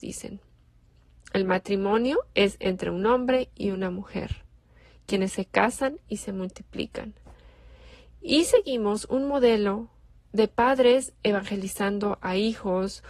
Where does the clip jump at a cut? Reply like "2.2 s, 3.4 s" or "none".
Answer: none